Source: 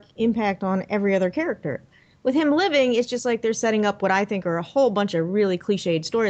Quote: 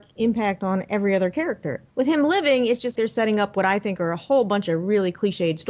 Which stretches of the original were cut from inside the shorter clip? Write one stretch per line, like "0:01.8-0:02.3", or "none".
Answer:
0:01.9-0:02.2
0:03.2-0:03.4